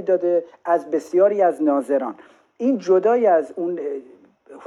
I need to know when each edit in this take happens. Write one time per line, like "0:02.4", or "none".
none